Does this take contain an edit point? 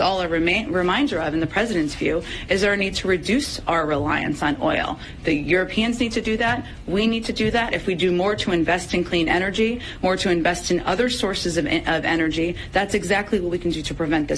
no; 0 cuts

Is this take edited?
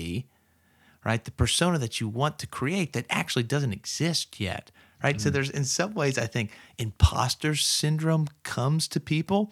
no; 0 cuts

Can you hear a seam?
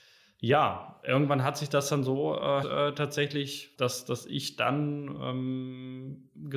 yes; 2 cuts; at 2.6 s, 3.7 s

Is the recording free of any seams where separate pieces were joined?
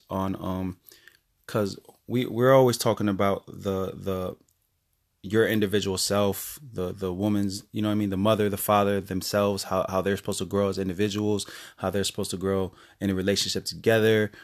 yes; 0 cuts

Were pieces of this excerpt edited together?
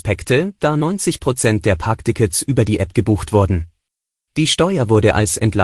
yes; 1 cut; at 4.3 s

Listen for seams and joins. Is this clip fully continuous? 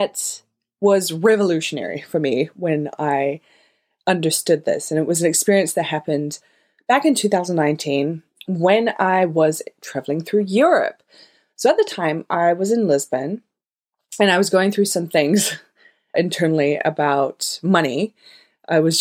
no; 1 cut; at 16.1 s

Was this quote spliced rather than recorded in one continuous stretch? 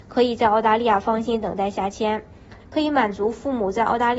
yes; 1 cut; at 2.6 s

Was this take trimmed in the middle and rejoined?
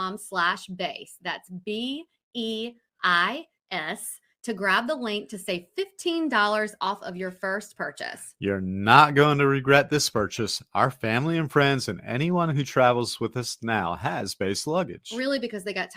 no; 0 cuts

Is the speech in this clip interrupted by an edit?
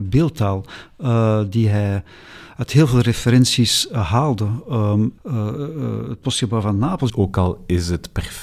yes; 2 cuts; at 5.2 s, 7.1 s

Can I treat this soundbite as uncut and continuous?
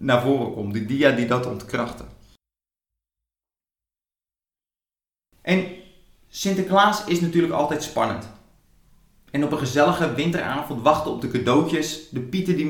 yes; 0 cuts

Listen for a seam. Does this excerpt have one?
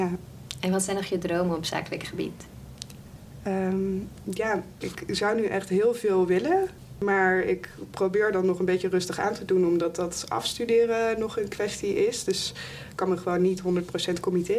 no; 0 cuts

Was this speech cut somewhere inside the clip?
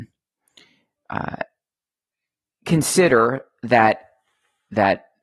no; 0 cuts

